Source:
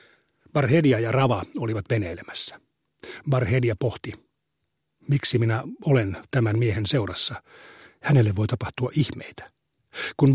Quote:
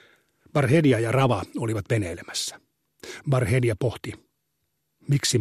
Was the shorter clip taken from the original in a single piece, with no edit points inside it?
yes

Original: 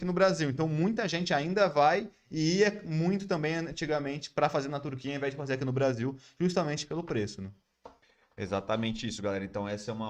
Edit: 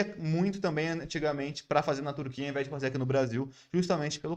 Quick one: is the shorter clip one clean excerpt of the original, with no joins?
yes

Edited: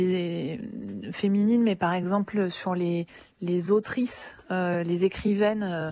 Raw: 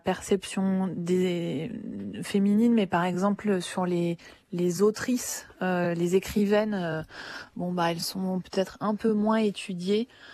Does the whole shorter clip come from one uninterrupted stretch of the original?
yes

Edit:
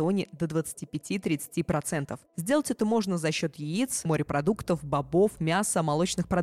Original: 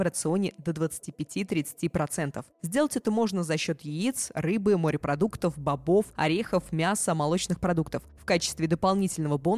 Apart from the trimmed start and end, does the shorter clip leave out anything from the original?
yes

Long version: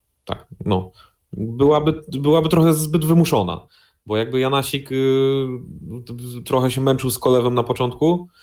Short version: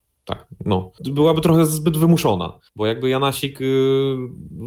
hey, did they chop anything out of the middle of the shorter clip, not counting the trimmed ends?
yes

